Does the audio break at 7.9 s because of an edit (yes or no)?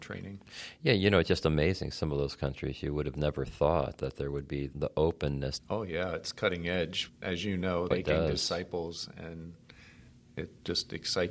yes